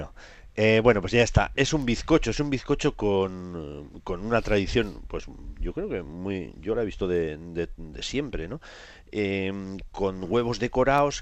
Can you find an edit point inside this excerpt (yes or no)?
no